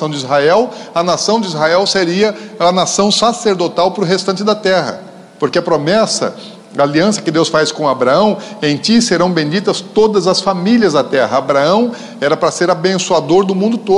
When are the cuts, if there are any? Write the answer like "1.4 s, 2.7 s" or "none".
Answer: none